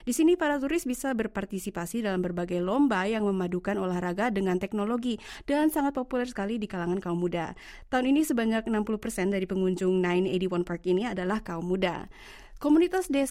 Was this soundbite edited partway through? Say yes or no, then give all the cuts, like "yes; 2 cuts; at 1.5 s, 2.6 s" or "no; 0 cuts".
no; 0 cuts